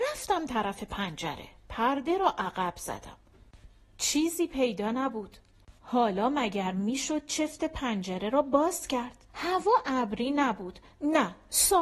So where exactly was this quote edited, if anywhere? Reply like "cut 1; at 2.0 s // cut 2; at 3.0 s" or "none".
cut 1; at 5.8 s // cut 2; at 9.3 s